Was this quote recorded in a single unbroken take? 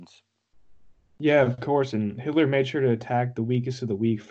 yes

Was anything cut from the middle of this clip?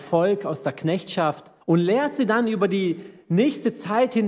yes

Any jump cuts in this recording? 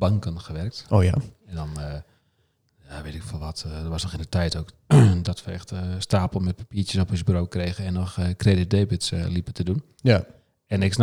no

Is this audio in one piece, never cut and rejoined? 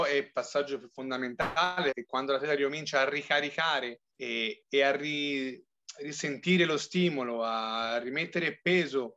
no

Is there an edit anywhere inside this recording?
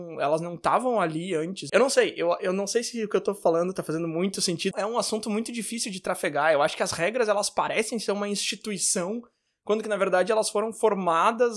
yes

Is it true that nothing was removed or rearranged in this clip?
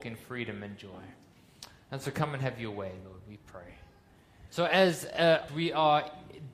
no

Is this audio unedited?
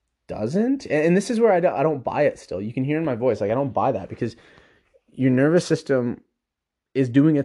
yes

